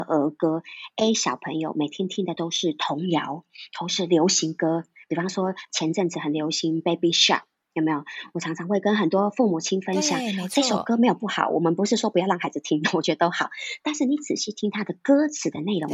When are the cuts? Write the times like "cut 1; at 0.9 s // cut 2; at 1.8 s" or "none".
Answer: none